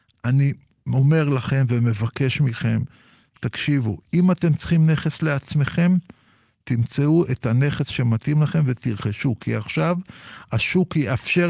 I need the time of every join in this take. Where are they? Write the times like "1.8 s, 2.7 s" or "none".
none

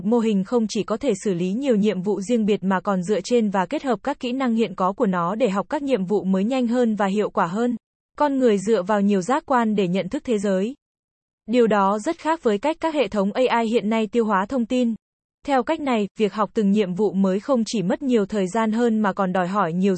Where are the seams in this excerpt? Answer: 8.0 s, 15.4 s

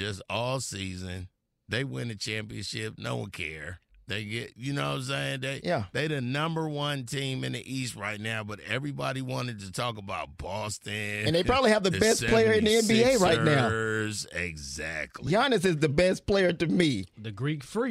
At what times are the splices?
none

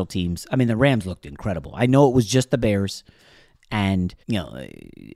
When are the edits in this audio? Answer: 4.2 s

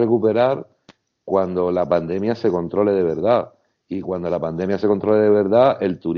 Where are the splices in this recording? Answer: none

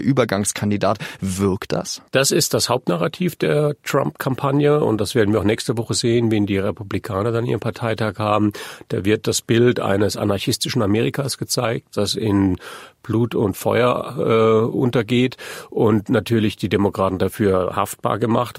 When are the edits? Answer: 2.1 s

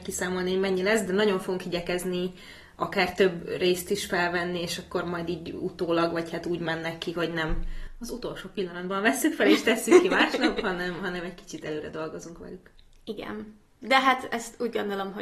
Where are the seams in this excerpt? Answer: none

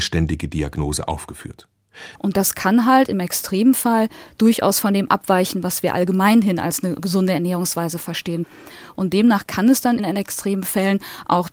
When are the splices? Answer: 2.2 s, 10.0 s

